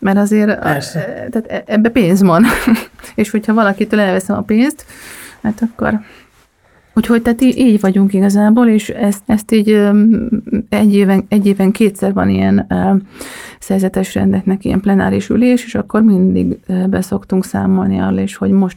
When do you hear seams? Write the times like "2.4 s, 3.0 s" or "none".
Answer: 9.2 s